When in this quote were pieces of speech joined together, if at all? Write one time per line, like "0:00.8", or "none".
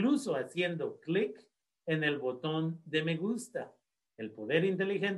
0:04.0